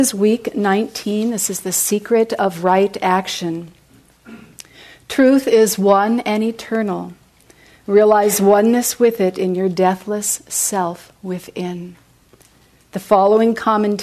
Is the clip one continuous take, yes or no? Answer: yes